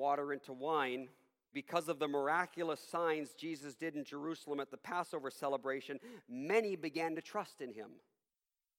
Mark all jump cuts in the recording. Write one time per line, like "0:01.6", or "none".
0:01.5